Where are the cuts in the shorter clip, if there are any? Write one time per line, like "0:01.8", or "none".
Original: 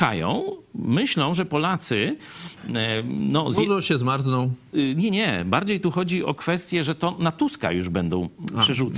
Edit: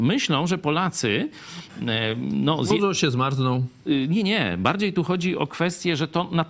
none